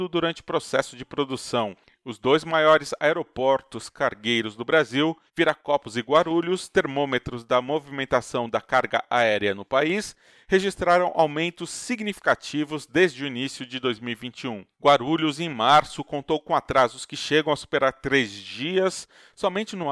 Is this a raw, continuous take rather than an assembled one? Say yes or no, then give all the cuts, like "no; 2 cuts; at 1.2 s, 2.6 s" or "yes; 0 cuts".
no; 1 cut; at 5.3 s